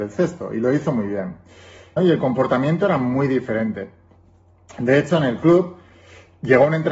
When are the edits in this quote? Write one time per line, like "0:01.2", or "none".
0:02.0